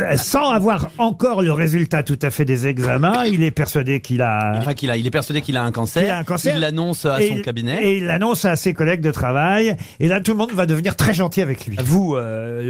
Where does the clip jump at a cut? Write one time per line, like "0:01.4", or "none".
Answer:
0:04.6
0:10.2
0:11.8

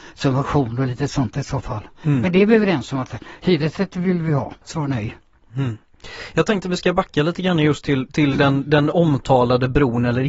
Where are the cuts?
0:04.6

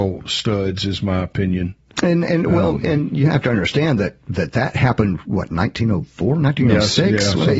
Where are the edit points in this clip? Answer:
none

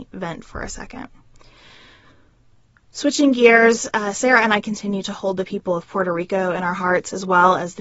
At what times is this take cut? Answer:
none

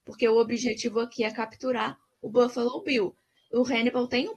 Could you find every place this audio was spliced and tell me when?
none

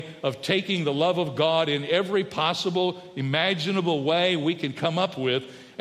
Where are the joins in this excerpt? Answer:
none

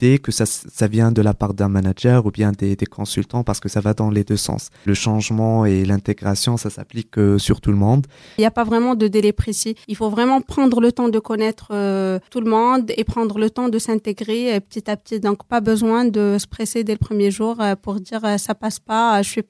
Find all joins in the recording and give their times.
0:08.4

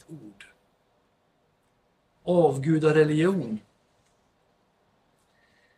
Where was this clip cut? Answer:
none

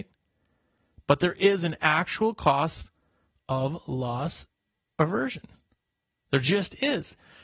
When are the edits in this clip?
none

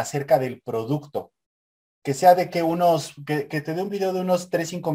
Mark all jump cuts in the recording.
0:03.5

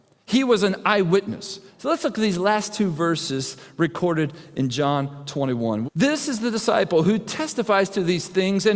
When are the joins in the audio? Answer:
0:01.7
0:05.8

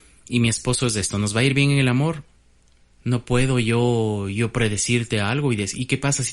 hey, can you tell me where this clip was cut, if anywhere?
0:02.9

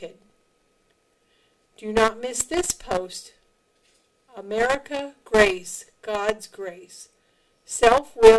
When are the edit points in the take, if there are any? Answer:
none

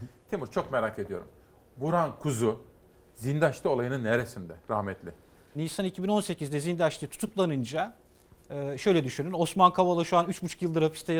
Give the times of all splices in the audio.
0:05.5

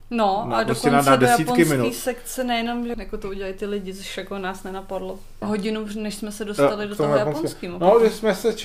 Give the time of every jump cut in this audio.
0:02.9
0:05.4

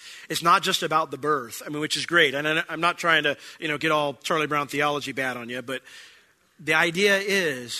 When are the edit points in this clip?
none

